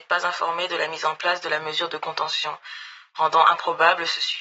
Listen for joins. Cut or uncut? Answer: uncut